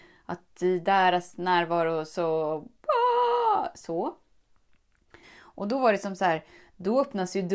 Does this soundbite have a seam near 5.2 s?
yes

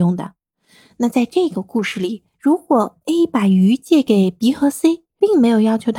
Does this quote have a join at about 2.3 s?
yes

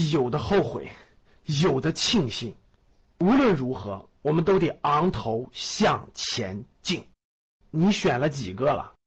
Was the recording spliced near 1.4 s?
no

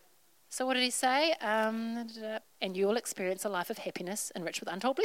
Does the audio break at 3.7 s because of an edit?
no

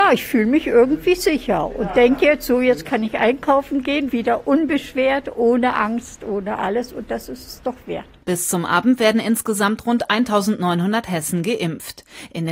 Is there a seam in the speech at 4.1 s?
yes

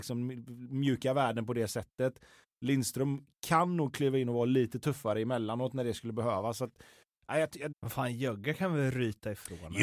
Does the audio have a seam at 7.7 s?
yes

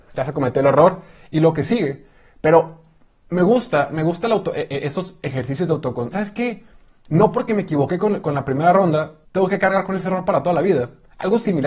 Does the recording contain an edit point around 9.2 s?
yes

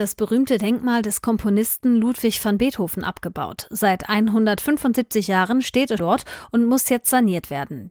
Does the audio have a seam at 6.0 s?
yes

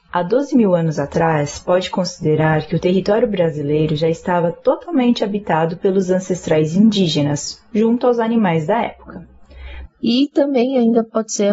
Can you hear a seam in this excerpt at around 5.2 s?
no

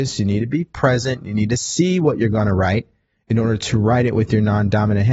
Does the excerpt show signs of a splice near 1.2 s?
no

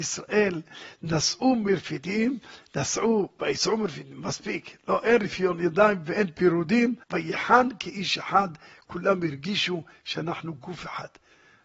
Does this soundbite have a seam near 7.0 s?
yes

